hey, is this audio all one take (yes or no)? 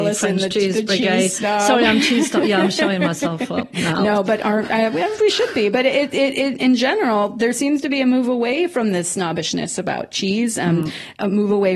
yes